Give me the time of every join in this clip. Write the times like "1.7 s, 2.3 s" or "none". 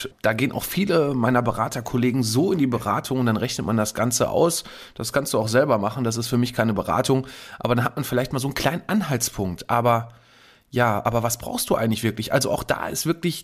none